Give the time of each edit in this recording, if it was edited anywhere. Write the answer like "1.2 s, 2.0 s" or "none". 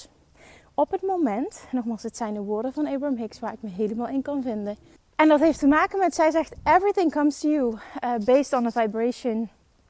5.0 s